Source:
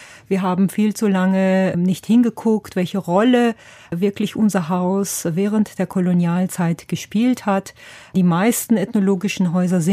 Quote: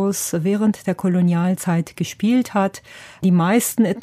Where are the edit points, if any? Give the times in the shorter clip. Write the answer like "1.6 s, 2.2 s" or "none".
none